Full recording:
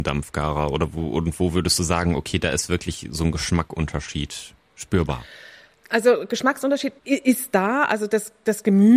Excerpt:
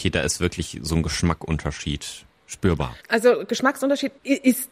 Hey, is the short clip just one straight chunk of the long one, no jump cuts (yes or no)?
no